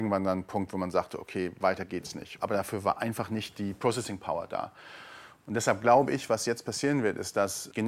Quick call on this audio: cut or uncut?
cut